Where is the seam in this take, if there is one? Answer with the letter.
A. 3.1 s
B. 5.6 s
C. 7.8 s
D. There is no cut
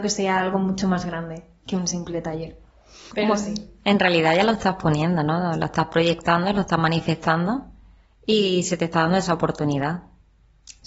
A